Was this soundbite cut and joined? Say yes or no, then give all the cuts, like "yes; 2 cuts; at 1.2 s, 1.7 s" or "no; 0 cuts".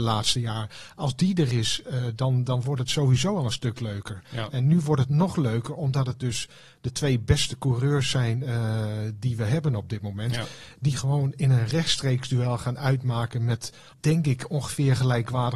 no; 0 cuts